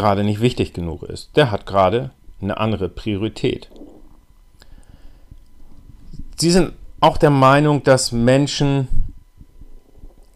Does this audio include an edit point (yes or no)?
no